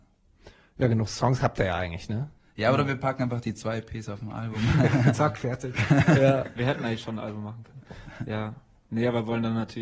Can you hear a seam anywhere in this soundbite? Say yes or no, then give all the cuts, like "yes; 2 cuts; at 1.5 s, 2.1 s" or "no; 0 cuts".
no; 0 cuts